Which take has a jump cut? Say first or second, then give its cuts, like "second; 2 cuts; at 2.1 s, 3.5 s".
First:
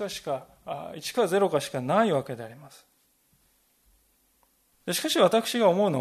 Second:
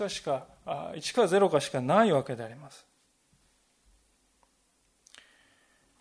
first; 1 cut; at 4.7 s